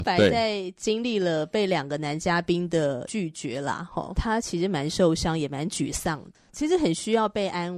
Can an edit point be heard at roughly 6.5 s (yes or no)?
no